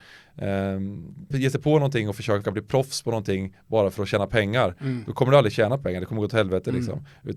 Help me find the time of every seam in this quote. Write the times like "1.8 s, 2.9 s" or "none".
1.3 s, 2.4 s